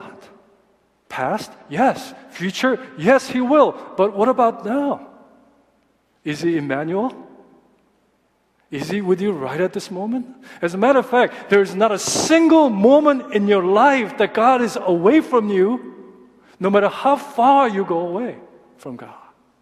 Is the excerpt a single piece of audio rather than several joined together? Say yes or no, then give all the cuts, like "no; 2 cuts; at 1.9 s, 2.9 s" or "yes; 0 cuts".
no; 1 cut; at 1.0 s